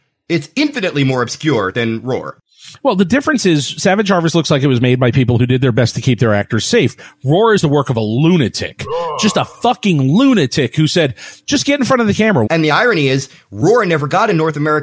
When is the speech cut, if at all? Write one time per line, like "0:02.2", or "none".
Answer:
0:11.4
0:12.5